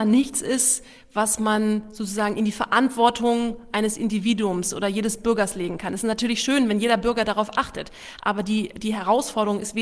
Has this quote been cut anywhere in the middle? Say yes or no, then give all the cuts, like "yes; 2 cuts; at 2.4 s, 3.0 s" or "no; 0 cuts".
no; 0 cuts